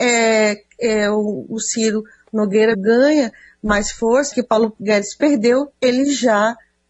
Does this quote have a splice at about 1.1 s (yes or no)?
no